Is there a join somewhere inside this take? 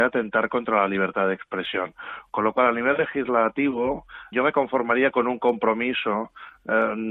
yes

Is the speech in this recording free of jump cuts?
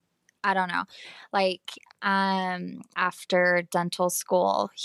no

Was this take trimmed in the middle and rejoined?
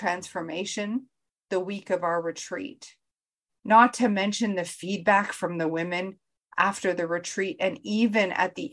yes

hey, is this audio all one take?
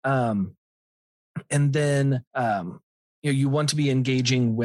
no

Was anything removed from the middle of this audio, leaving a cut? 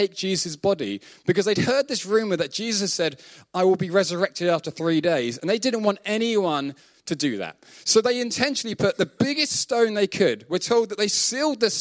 no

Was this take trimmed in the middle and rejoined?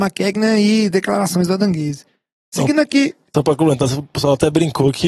no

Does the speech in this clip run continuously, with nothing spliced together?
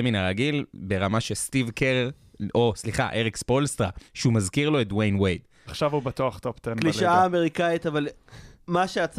no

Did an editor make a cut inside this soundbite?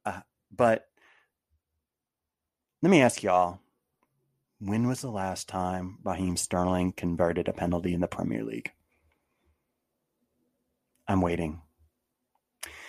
no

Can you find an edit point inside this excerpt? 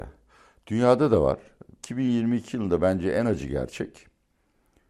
yes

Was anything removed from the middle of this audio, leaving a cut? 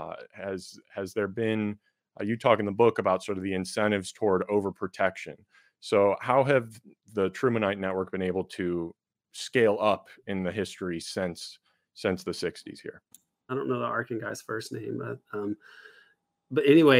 yes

